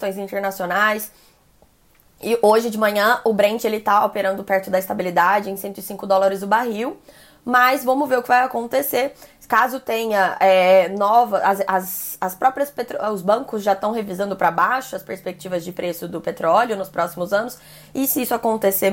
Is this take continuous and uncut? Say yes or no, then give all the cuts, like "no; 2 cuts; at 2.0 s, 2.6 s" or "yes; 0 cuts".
yes; 0 cuts